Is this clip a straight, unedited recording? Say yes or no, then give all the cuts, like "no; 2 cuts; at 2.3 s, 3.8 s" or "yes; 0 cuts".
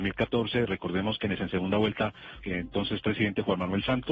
no; 2 cuts; at 1.4 s, 2.4 s